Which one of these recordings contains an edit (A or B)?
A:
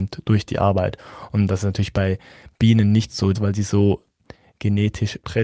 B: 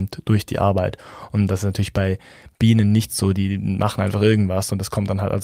A